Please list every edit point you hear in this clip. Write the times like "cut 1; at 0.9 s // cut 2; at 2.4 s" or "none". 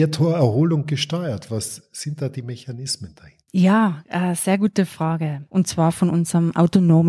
cut 1; at 3.5 s // cut 2; at 5.5 s

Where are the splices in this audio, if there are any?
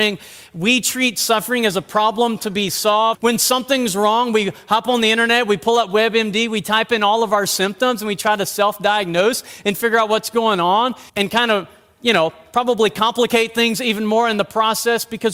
cut 1; at 3.1 s // cut 2; at 11.1 s

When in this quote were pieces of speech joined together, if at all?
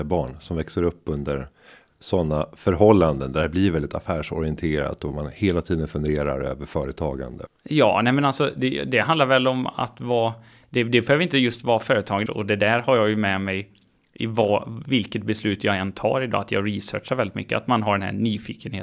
cut 1; at 7.5 s // cut 2; at 12.3 s

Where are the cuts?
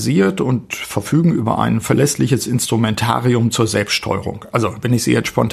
none

